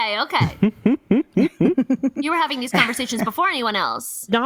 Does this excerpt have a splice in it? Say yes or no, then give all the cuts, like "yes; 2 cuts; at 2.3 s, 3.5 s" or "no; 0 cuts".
no; 0 cuts